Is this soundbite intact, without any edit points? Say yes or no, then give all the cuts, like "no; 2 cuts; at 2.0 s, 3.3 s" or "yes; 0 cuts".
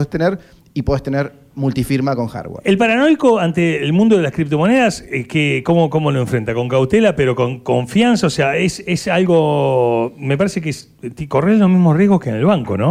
yes; 0 cuts